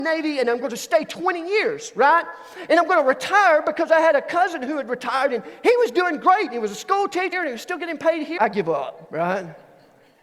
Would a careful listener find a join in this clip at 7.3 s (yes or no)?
yes